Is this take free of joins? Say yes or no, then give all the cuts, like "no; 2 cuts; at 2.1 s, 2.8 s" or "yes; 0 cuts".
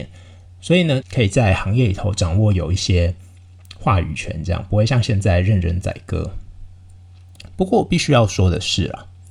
no; 1 cut; at 1.0 s